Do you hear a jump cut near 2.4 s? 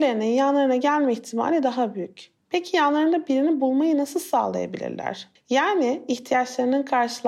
yes; 2 cuts; at 2.4 s, 5.4 s

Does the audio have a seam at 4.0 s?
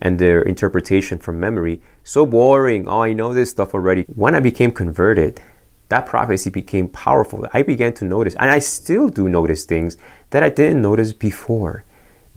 yes; 1 cut; at 4.0 s

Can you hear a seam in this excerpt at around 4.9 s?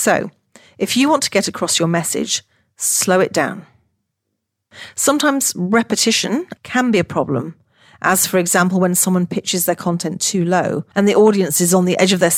no; 2 cuts; at 6.6 s, 10.9 s

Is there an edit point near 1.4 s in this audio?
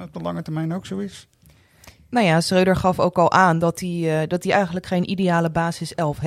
no; 0 cuts

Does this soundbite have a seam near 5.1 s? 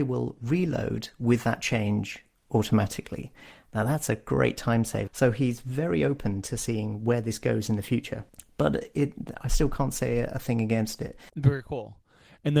yes; 2 cuts; at 5.1 s, 11.3 s

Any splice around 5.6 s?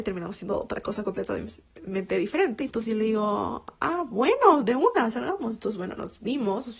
no; 1 cut; at 2.6 s

